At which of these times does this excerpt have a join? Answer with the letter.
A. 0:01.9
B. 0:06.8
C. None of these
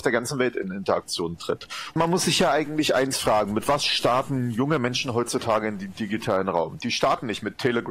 A